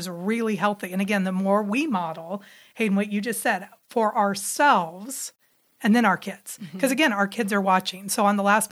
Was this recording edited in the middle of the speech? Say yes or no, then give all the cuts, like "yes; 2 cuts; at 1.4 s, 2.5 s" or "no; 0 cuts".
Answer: no; 0 cuts